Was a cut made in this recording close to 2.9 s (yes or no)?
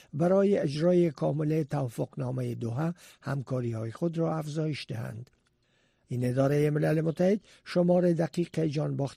no